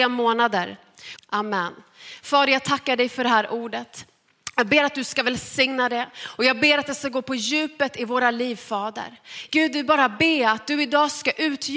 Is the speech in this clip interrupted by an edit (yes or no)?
yes